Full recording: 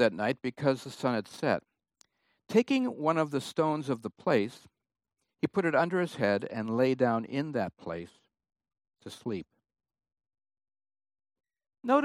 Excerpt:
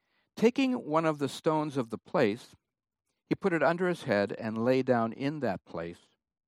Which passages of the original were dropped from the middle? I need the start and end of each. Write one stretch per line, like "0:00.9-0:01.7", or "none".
none